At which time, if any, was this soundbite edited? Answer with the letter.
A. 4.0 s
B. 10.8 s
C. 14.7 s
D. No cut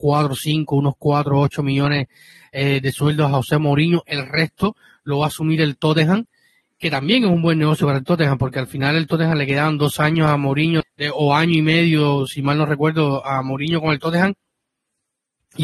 B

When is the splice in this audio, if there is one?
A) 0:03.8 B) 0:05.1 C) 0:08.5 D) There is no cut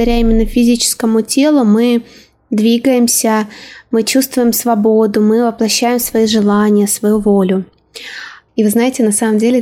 C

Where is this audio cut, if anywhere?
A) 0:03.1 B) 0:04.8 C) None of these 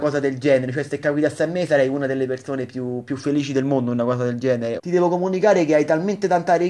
B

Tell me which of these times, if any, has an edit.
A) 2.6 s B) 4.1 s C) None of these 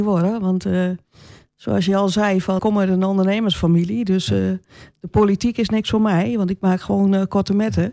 A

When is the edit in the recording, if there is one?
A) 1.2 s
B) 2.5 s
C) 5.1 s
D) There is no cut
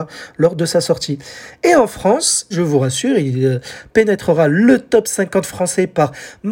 B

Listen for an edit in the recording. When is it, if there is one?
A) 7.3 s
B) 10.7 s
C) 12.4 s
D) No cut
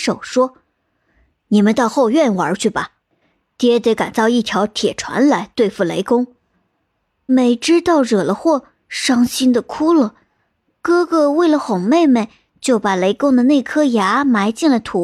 A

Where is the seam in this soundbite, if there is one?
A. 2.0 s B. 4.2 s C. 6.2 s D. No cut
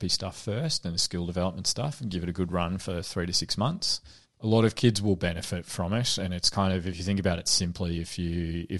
B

